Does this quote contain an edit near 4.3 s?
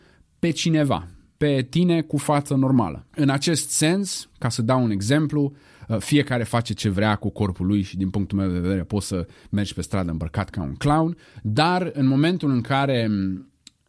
no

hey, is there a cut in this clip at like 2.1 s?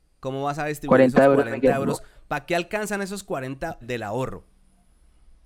no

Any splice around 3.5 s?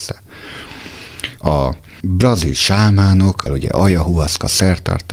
yes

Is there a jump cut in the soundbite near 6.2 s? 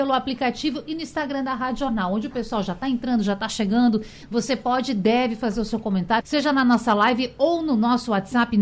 yes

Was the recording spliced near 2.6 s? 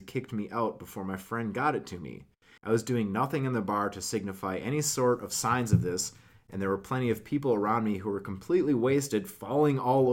yes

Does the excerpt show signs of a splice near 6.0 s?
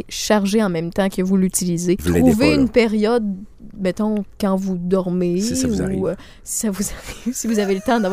no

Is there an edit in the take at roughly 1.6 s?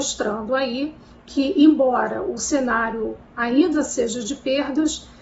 no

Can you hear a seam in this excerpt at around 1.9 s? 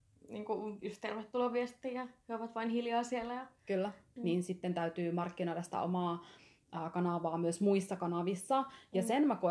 no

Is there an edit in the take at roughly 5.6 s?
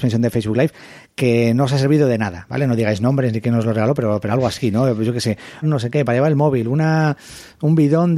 yes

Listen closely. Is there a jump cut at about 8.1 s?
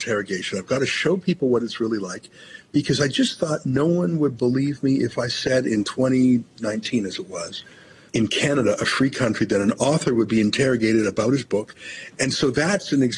yes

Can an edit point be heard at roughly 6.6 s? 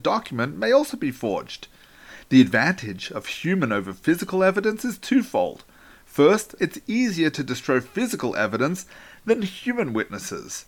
yes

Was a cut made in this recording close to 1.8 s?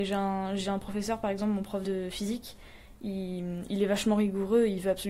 yes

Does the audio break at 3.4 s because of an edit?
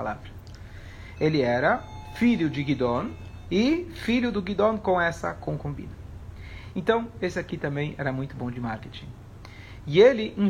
yes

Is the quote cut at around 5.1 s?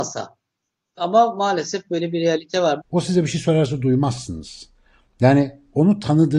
no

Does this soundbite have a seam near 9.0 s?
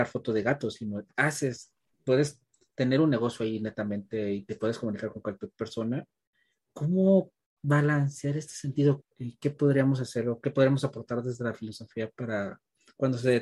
yes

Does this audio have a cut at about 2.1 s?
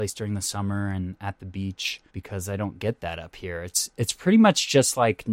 yes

